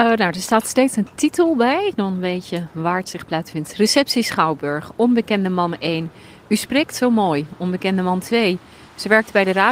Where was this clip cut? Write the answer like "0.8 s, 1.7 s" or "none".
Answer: none